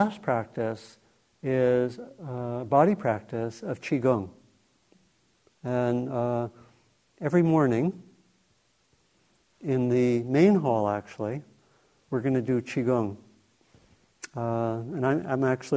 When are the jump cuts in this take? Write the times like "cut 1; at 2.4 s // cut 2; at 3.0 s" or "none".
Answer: none